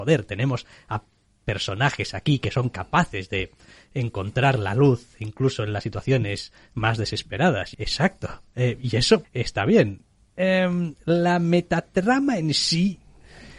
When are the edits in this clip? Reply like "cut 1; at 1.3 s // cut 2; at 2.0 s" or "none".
cut 1; at 7.7 s // cut 2; at 9.2 s